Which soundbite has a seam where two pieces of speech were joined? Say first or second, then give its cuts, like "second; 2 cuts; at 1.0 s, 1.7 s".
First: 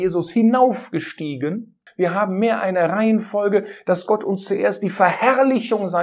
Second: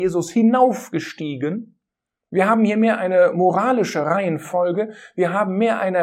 first; 1 cut; at 1.9 s